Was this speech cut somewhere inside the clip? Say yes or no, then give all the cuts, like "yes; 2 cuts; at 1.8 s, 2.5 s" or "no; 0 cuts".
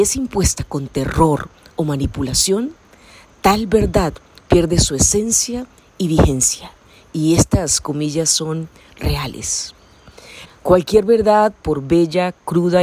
yes; 1 cut; at 10.5 s